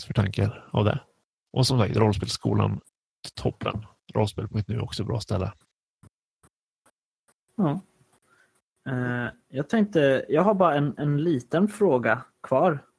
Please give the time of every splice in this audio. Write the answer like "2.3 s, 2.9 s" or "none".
none